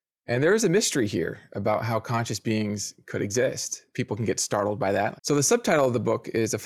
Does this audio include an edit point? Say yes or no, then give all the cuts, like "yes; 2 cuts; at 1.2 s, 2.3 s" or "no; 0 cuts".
yes; 2 cuts; at 3.9 s, 5.2 s